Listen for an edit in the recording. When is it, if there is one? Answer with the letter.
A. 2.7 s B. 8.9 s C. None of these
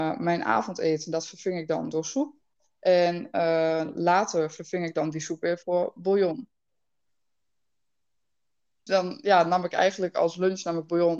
B